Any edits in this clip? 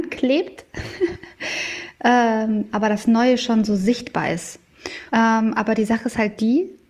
yes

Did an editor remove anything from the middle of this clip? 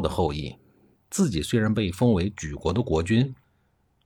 no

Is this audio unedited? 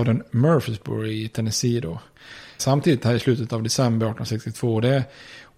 no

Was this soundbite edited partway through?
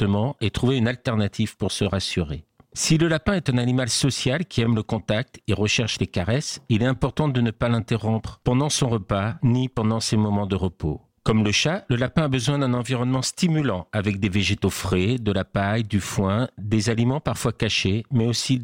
no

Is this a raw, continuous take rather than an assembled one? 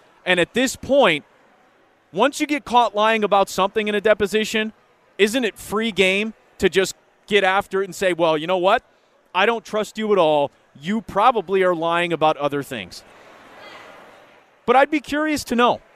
yes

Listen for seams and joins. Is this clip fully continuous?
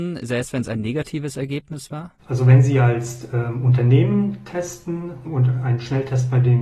no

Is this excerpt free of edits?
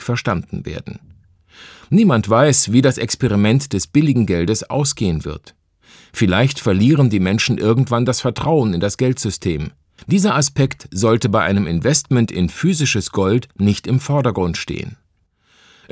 no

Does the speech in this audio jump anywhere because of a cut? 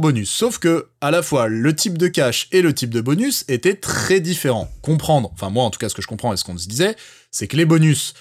no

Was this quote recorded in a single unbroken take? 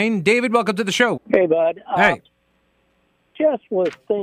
no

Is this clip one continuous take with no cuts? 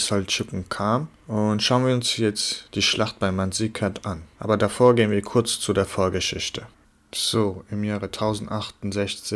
yes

